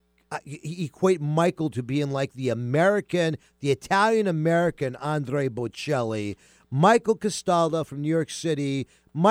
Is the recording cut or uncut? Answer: uncut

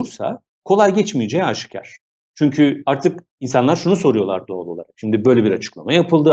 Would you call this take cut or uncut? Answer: uncut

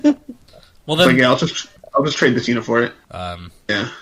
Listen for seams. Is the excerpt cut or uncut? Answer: cut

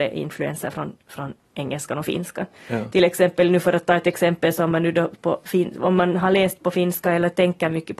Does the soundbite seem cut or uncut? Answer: cut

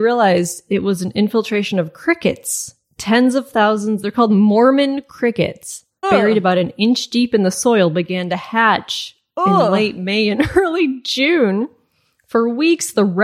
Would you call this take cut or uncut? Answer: cut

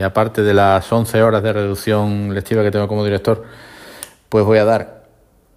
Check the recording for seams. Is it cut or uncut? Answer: uncut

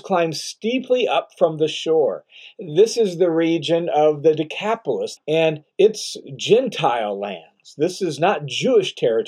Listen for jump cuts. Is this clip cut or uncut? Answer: cut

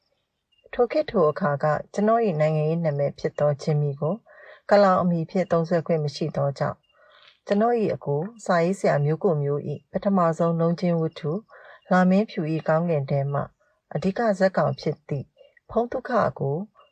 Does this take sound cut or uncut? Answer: uncut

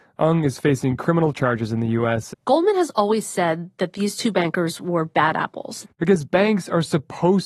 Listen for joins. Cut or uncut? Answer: cut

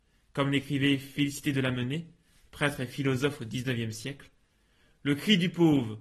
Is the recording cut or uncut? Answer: uncut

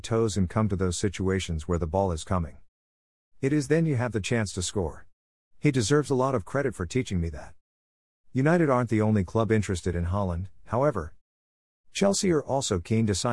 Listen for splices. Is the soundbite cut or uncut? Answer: uncut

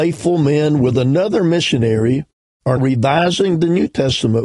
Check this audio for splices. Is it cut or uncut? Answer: cut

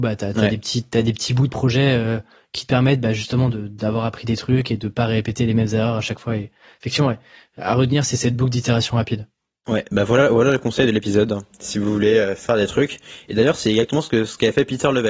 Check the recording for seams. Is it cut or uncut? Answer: uncut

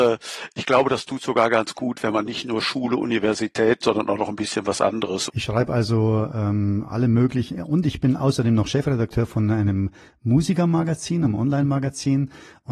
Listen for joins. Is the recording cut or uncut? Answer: cut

